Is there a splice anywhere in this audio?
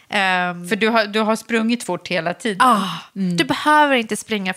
no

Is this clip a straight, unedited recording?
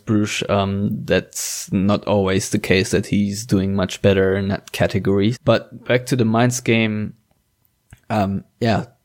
no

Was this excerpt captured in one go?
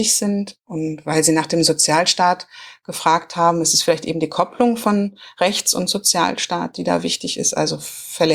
yes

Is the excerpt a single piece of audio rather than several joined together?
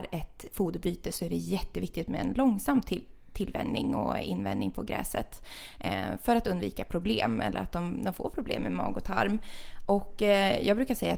yes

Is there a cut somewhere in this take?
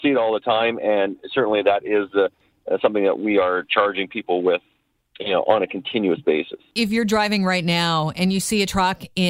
no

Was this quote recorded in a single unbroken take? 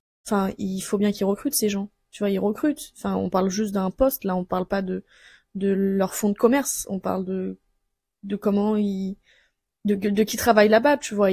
yes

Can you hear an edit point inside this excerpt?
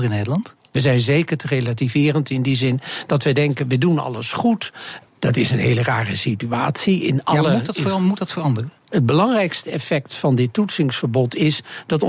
yes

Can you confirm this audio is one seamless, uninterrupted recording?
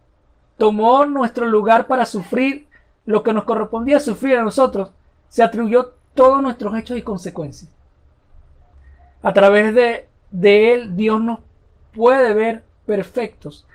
yes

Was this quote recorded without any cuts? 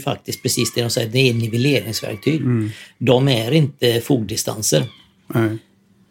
yes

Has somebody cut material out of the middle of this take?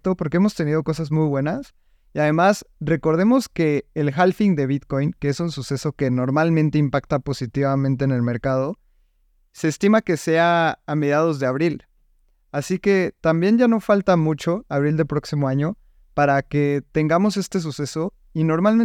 no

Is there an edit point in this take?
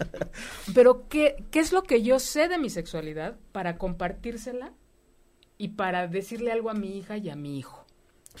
no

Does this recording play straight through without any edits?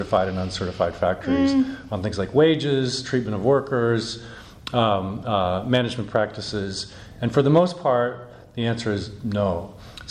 yes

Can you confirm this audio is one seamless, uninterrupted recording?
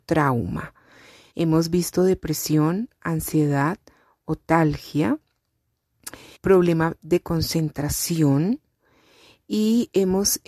no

